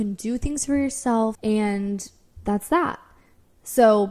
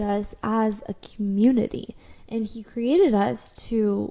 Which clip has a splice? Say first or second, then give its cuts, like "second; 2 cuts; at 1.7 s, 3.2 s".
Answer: first; 1 cut; at 1.3 s